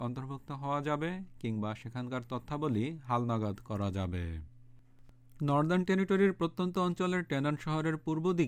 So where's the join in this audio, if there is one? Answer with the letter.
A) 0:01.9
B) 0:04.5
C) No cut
C